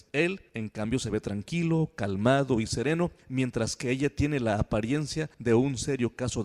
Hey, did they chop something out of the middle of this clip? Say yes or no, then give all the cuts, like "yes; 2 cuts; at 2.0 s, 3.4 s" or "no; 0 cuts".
no; 0 cuts